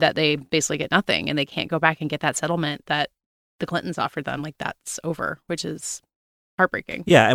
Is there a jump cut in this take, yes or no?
no